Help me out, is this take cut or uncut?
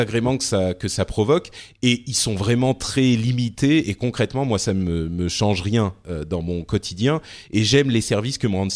uncut